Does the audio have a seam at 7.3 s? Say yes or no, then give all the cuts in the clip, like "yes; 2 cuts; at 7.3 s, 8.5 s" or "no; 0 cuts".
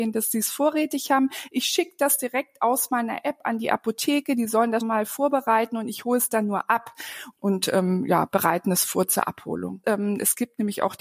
yes; 3 cuts; at 4.8 s, 7.3 s, 9.8 s